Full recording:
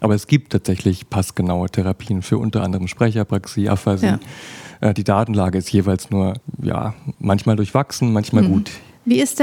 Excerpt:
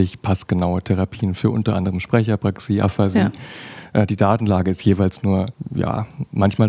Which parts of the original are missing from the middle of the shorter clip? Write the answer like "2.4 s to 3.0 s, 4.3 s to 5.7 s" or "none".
none